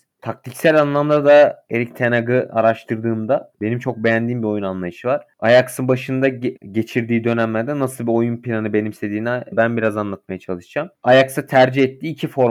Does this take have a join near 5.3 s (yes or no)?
no